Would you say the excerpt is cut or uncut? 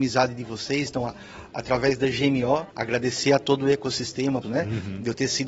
cut